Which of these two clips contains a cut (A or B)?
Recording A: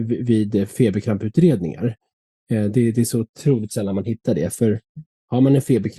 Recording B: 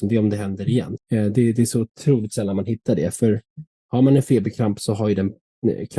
B